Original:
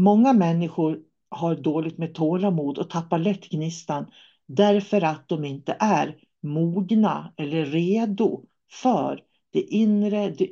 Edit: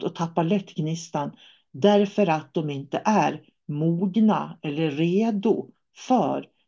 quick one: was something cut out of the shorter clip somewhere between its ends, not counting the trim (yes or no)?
no